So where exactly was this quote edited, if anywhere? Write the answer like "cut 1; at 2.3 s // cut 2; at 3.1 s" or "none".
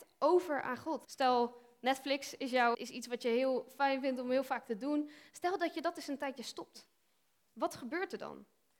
cut 1; at 1.0 s // cut 2; at 2.7 s